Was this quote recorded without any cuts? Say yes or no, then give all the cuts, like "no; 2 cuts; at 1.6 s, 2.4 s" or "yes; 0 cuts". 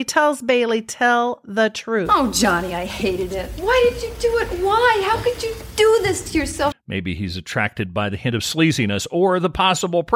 no; 1 cut; at 6.7 s